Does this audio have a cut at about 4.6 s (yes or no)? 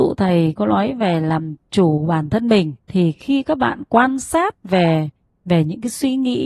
no